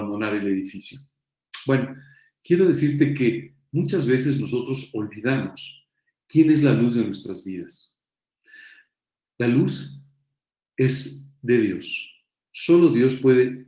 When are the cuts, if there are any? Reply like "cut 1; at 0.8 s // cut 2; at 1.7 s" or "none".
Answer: none